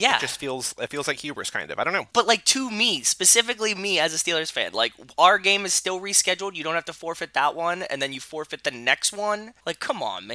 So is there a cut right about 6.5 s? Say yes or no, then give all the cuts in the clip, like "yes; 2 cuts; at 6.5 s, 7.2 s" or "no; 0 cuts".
no; 0 cuts